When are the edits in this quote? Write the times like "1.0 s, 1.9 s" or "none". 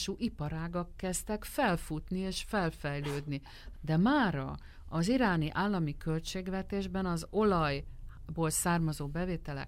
3.7 s